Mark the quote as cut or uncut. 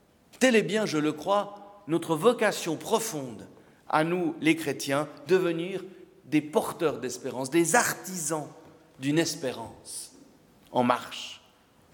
uncut